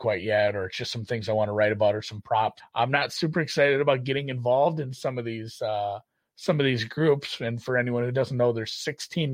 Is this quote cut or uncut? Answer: cut